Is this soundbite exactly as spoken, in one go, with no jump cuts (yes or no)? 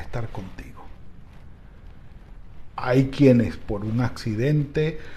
no